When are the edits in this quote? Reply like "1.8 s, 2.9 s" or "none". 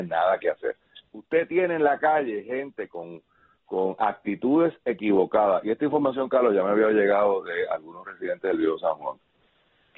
1.0 s